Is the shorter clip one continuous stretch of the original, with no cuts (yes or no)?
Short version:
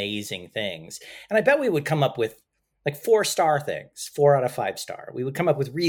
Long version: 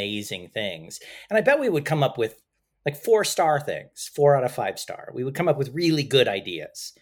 yes